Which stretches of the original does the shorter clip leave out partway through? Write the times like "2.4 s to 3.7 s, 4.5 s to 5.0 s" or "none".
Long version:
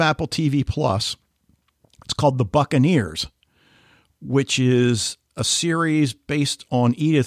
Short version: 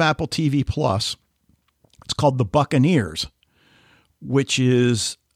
none